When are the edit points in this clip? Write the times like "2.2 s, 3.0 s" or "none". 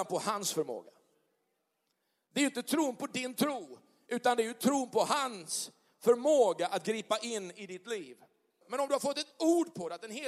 8.6 s